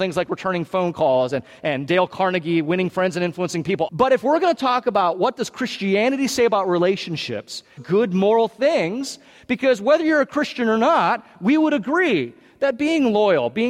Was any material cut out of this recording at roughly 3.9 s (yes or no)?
yes